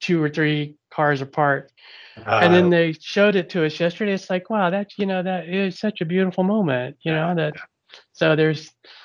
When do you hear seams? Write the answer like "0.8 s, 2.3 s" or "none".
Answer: 5.8 s